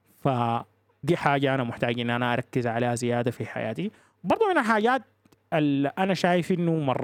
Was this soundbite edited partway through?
yes; 1 cut; at 1.0 s

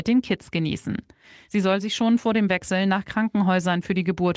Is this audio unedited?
no; 1 cut; at 1.4 s

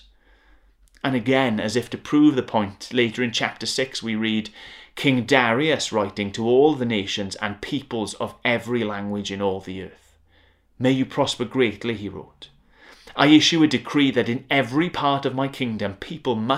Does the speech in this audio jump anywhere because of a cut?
no; 0 cuts

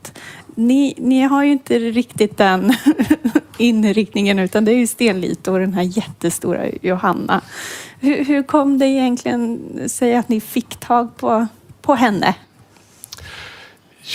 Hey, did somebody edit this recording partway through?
no; 0 cuts

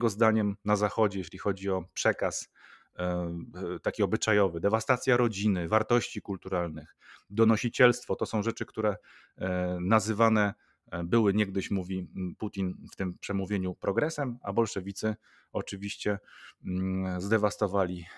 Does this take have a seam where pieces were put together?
no; 0 cuts

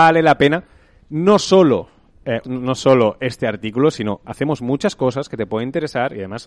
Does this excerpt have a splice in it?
yes; 1 cut; at 2.4 s

